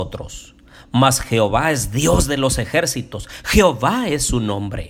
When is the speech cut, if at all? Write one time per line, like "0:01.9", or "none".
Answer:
none